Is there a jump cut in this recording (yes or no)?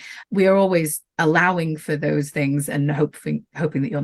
yes